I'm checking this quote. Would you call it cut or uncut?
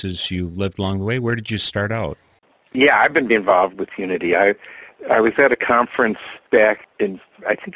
cut